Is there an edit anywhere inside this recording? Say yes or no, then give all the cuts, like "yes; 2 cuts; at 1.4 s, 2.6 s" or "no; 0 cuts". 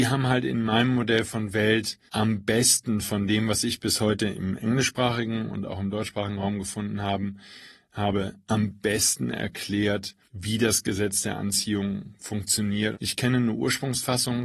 yes; 3 cuts; at 2.1 s, 10.2 s, 12.9 s